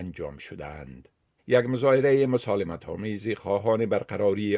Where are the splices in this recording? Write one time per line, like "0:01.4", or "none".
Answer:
0:01.4

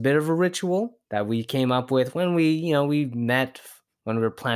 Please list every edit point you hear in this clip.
0:01.0

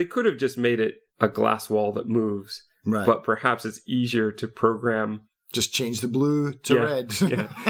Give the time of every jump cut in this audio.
none

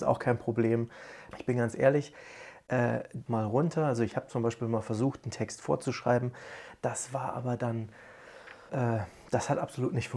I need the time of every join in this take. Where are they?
0:01.3
0:03.3
0:08.7

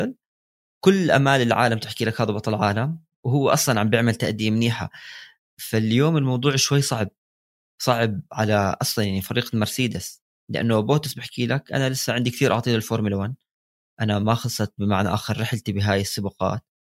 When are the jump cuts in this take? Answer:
none

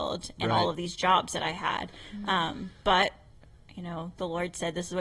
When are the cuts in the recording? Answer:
none

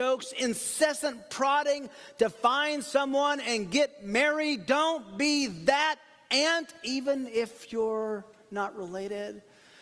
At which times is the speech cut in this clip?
none

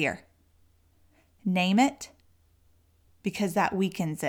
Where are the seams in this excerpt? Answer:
none

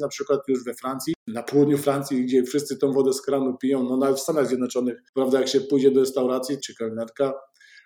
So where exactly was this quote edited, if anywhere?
0:05.1
0:06.6

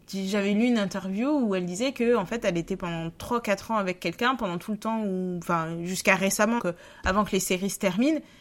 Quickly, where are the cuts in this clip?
0:06.6

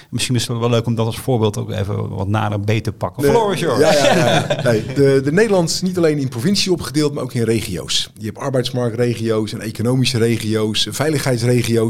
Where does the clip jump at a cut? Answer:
0:03.2

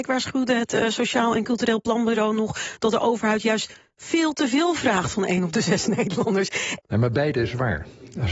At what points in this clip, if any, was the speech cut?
0:06.8

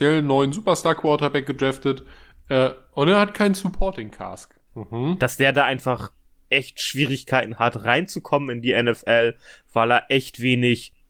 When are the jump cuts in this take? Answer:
0:04.7

